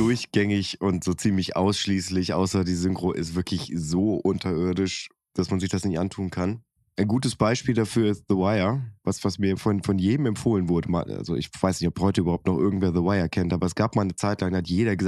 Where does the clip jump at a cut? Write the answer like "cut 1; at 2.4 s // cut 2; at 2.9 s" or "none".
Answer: none

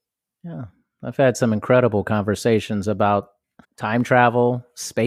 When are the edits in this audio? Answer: cut 1; at 3.6 s

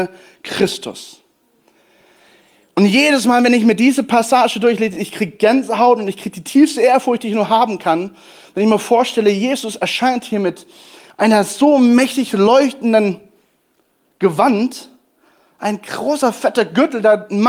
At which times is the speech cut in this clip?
none

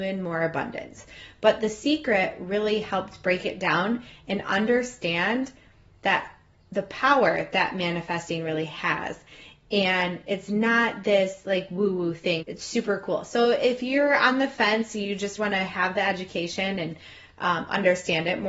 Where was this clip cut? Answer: cut 1; at 12.4 s // cut 2; at 15.4 s

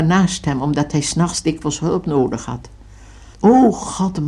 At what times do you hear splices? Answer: cut 1; at 3.3 s

